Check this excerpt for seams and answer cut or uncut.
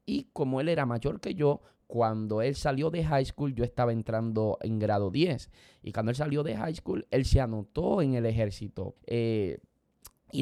cut